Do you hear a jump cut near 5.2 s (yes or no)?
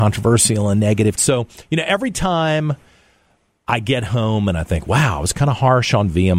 no